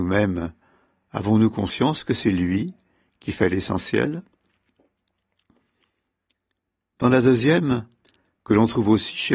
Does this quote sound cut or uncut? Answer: uncut